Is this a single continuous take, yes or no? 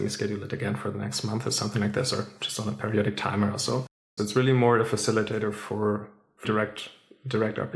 no